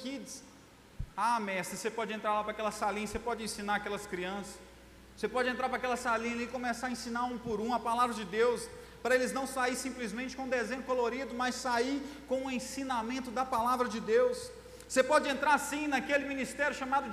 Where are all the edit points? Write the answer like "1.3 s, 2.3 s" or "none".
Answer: none